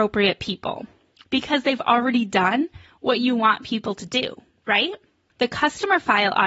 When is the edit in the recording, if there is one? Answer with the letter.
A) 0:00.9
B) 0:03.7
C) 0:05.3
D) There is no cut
C